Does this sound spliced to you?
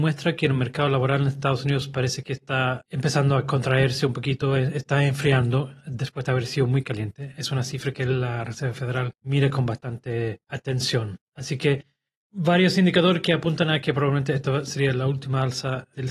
no; 0 cuts

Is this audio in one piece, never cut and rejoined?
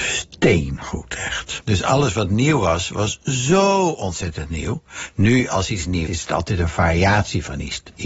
no; 2 cuts; at 1.6 s, 6.1 s

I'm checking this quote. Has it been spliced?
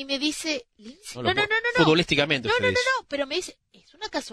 yes; 1 cut; at 1.1 s

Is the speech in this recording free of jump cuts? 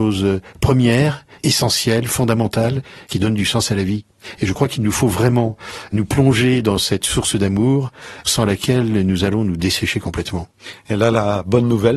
yes; 0 cuts

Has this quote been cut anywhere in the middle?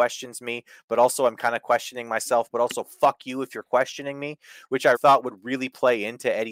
yes; 1 cut; at 4.9 s

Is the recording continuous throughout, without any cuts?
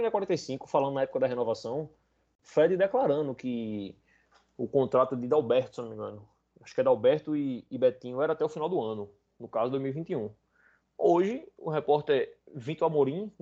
yes; 0 cuts

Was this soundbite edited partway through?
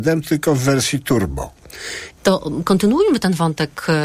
yes; 1 cut; at 2.2 s

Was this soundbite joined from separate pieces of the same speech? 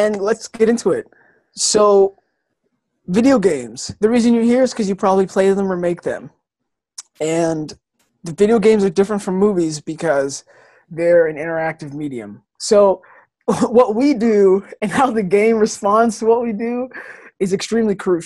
no; 0 cuts

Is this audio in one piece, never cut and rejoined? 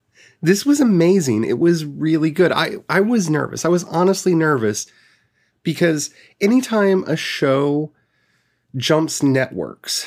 yes; 0 cuts

